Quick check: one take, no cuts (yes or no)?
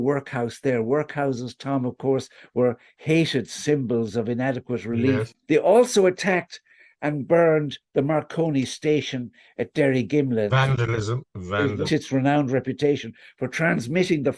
no